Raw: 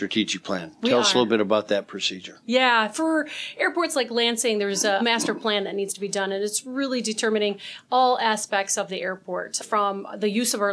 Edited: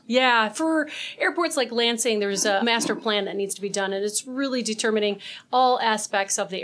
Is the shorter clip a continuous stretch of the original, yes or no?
yes